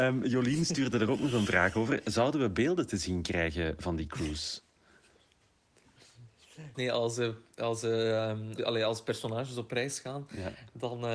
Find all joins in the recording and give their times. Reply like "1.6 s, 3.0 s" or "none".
6.7 s, 8.6 s